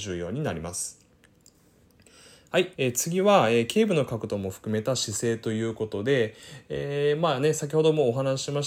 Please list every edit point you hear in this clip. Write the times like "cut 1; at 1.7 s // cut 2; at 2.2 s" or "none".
cut 1; at 2.7 s